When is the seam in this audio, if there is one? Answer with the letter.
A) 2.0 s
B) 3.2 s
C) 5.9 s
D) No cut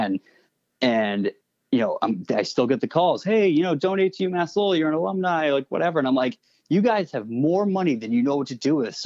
D